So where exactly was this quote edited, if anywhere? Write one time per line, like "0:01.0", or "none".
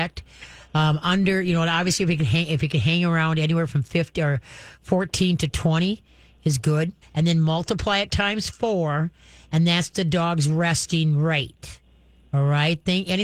0:07.0